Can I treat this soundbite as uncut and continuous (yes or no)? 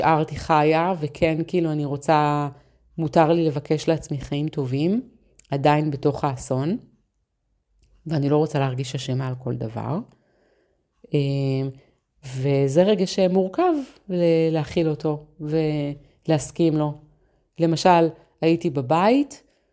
yes